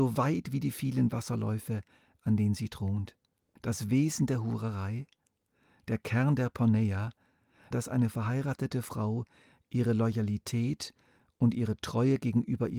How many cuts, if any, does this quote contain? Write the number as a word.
two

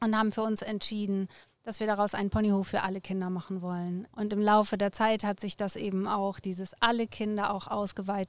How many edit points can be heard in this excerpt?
one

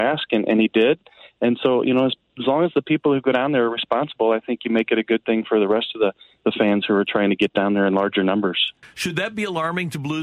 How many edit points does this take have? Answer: one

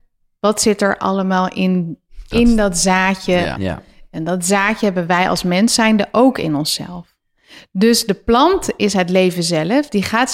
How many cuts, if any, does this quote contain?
one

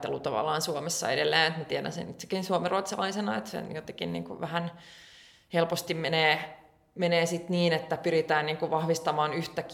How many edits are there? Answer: zero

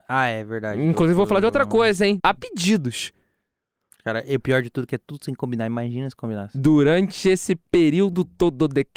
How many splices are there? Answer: one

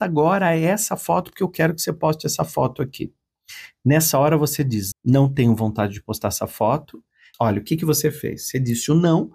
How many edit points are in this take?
two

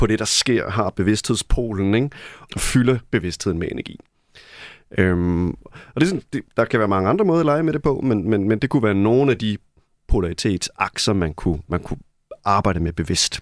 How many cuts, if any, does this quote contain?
one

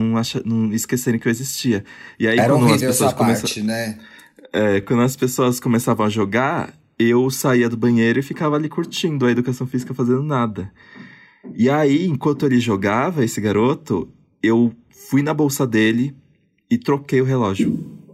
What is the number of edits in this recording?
zero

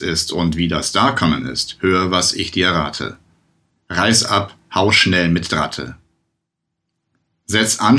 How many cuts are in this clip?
zero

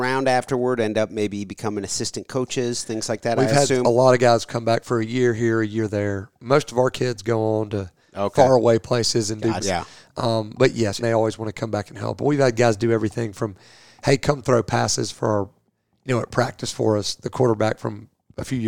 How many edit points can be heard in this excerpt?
two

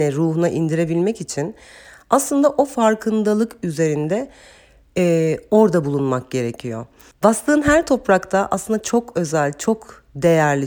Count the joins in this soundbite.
one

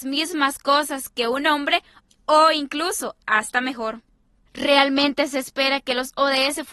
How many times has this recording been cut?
one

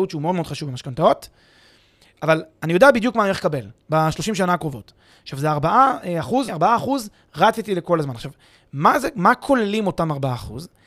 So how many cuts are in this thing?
one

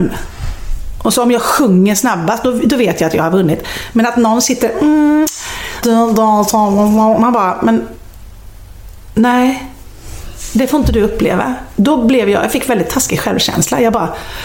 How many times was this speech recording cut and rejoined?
one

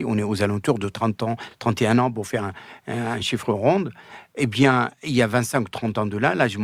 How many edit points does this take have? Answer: zero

